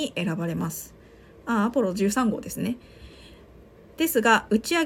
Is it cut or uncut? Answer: uncut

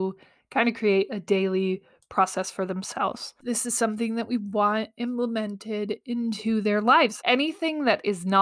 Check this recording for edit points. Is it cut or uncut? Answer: cut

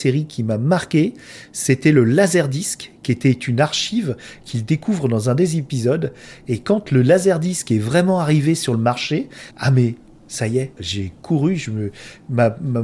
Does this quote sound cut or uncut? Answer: cut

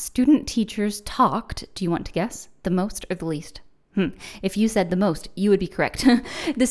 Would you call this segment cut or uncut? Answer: uncut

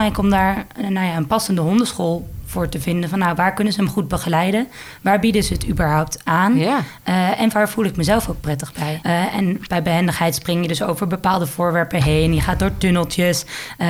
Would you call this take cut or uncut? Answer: cut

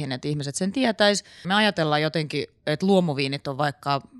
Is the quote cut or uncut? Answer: cut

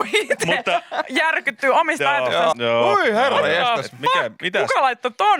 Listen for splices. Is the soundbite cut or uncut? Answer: cut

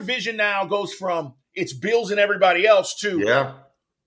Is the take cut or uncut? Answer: uncut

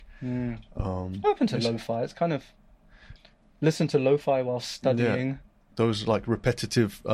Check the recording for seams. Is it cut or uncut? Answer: uncut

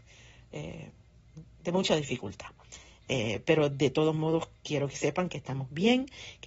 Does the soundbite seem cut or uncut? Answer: uncut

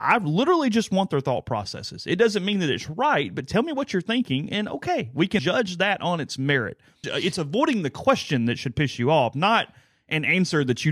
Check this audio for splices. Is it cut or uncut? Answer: cut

